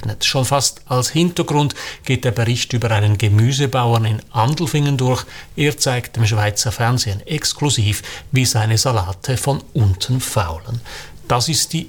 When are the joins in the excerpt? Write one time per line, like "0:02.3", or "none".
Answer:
none